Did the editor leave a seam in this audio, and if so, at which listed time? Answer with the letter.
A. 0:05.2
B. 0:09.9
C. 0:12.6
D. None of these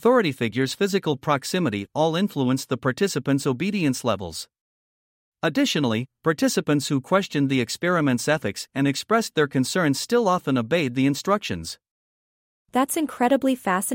D